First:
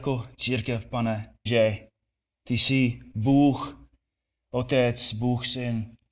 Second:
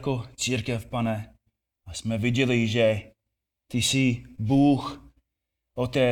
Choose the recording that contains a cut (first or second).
first